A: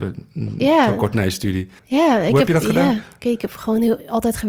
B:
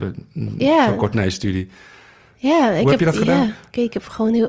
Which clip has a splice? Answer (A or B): A